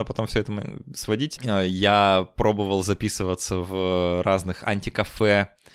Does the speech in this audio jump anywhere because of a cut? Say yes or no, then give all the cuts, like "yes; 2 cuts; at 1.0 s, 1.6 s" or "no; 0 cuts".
yes; 1 cut; at 1.4 s